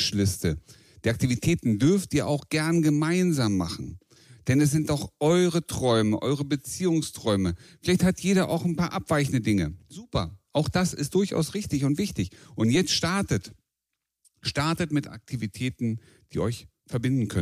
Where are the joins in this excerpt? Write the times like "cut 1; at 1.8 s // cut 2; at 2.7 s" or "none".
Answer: none